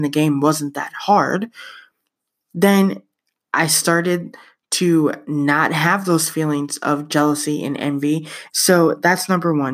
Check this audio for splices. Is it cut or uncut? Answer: cut